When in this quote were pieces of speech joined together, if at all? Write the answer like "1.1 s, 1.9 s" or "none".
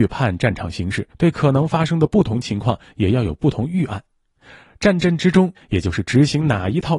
1.1 s, 5.6 s